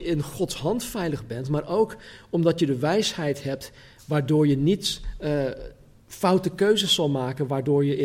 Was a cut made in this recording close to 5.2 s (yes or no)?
no